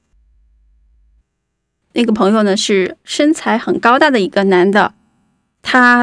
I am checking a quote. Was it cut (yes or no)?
yes